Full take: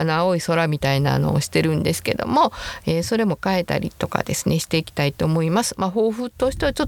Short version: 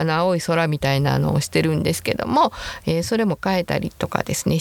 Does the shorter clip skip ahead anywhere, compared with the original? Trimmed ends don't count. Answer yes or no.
no